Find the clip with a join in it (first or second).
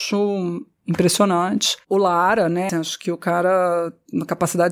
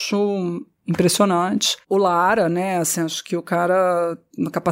first